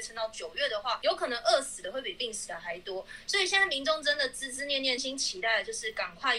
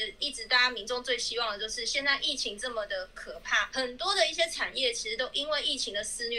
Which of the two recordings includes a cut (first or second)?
first